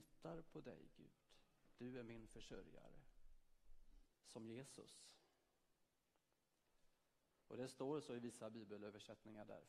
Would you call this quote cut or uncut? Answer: cut